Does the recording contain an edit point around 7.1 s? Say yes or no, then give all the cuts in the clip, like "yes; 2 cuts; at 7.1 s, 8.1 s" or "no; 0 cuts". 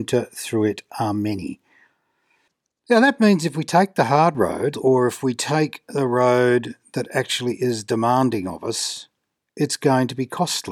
no; 1 cut; at 4.7 s